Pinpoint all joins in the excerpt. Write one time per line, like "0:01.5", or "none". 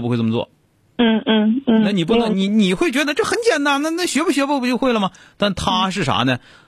none